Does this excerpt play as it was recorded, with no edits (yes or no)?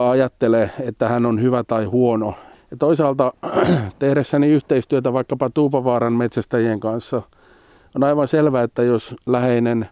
no